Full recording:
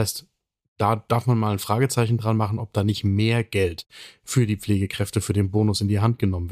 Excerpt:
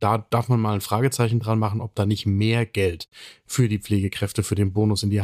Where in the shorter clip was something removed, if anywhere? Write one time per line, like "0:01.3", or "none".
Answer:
none

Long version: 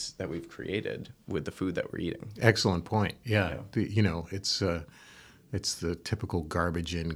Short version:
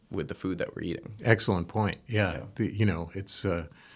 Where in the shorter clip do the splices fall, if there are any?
none

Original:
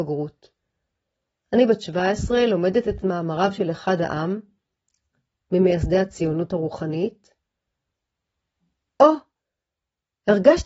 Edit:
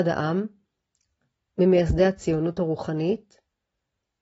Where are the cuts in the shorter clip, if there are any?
none

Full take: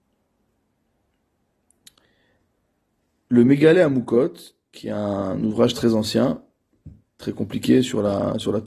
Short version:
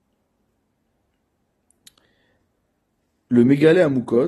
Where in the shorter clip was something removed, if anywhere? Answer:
none

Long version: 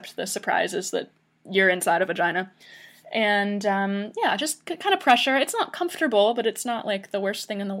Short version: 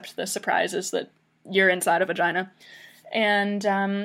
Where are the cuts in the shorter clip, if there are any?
none

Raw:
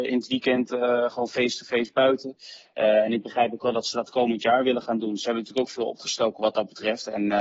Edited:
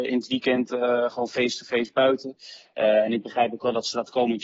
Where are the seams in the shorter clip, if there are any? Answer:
none

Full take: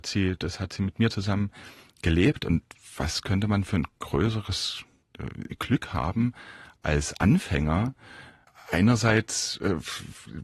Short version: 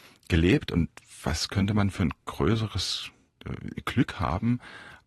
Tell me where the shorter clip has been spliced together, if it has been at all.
none

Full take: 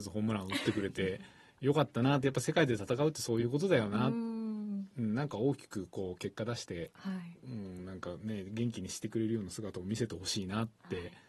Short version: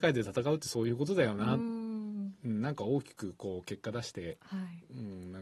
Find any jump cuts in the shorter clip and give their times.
none

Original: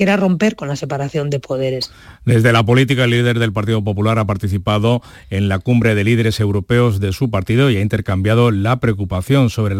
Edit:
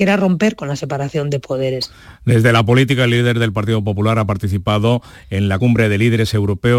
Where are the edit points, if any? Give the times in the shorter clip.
0:05.6

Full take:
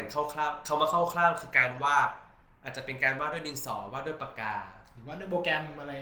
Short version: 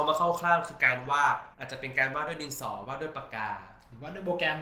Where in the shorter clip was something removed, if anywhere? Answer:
0:01.5

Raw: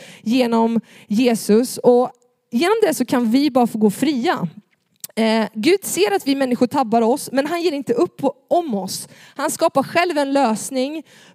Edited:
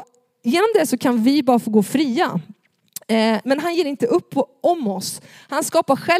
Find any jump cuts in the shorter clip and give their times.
0:03.4

